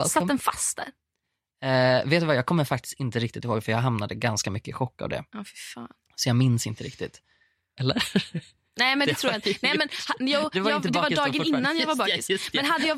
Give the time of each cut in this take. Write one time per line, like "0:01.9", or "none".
0:07.8
0:10.5